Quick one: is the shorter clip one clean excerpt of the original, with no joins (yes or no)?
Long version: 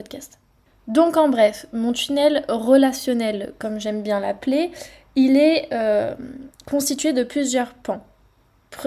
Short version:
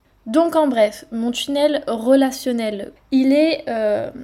no